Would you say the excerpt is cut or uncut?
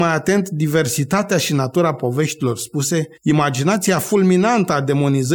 cut